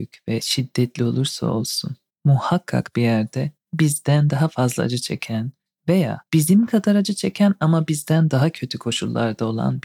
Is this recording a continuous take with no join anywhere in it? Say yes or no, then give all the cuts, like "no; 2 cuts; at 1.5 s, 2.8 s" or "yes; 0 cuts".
no; 2 cuts; at 2.1 s, 6.3 s